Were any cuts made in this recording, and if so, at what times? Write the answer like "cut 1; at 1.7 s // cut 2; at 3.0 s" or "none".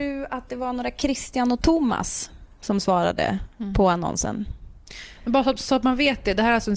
none